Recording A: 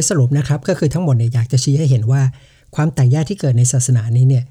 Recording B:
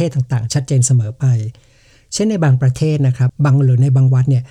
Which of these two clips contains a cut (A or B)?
B